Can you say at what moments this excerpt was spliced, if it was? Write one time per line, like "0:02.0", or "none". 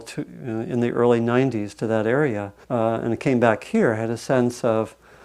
0:02.6